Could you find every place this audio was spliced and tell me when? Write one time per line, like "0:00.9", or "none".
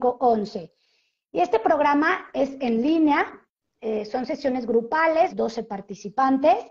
0:05.3